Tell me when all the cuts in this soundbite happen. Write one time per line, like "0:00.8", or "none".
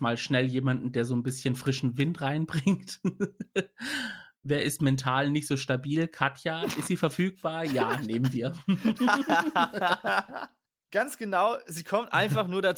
none